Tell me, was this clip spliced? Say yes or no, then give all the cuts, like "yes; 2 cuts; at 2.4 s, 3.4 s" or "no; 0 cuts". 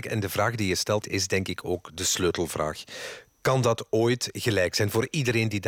yes; 1 cut; at 1.0 s